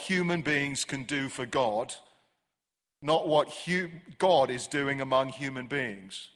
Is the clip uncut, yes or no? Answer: yes